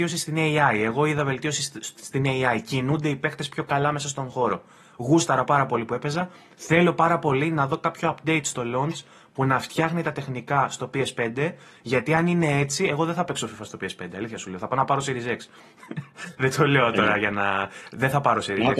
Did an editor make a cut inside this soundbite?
no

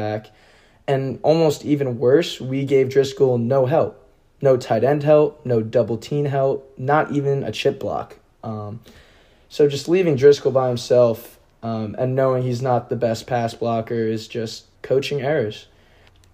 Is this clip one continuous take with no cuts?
no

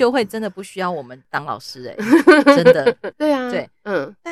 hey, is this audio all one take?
no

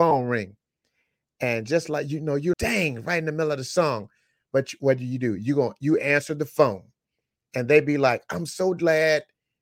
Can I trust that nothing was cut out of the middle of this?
no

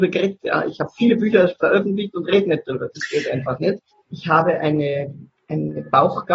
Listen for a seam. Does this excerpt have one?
yes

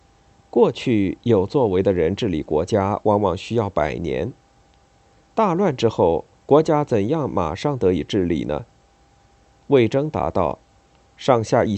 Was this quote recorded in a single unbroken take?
yes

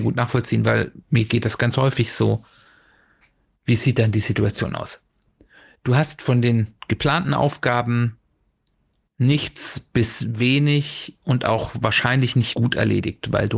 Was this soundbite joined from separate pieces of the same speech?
yes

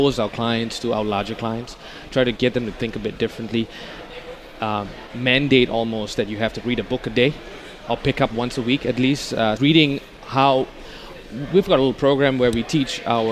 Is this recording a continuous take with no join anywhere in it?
no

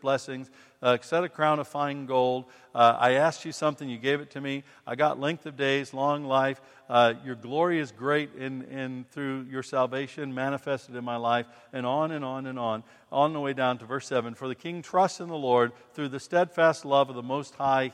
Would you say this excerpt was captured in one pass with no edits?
yes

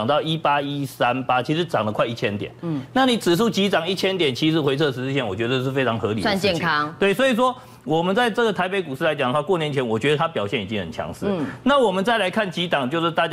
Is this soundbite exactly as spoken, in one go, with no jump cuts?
yes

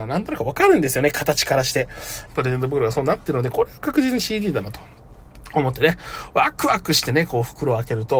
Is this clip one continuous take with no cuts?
no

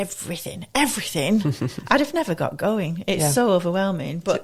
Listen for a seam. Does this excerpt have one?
no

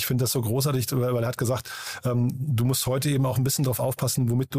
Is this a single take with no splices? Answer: yes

